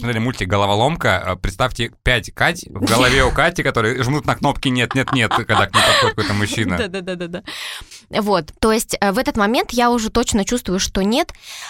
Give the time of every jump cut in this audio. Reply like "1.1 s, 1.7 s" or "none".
none